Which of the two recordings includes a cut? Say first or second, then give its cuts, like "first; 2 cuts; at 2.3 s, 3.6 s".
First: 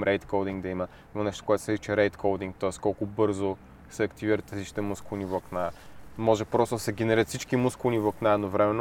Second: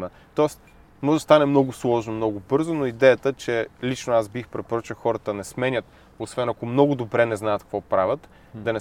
first; 1 cut; at 1.1 s